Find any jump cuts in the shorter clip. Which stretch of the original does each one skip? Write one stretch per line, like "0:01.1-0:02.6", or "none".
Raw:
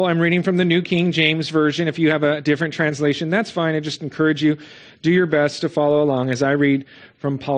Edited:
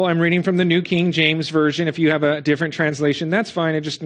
none